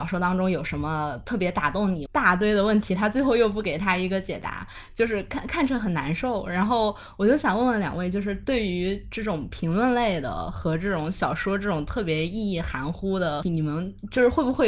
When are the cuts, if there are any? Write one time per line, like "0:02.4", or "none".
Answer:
0:02.1
0:13.4